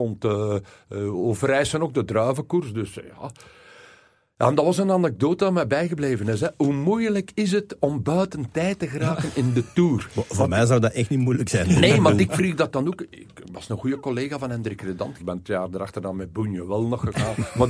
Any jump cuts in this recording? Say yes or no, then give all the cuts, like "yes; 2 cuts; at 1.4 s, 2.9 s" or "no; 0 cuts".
yes; 1 cut; at 15.2 s